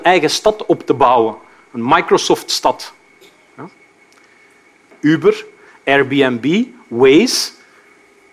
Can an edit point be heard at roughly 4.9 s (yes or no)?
yes